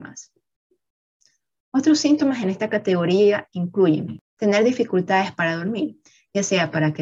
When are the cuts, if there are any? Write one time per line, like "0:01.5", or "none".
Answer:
none